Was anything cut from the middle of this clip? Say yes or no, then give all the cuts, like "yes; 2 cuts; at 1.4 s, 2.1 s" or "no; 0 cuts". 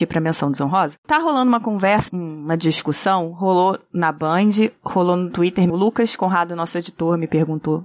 yes; 2 cuts; at 2.1 s, 5.7 s